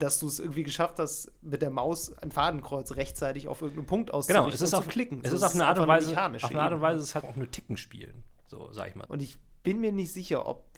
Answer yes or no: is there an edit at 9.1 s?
yes